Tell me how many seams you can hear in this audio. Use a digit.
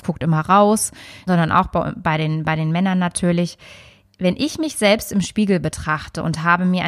1